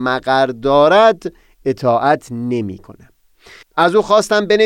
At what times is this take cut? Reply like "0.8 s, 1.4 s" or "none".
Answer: 3.6 s